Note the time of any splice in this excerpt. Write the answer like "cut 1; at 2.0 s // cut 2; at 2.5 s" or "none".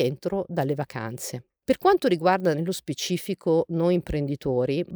none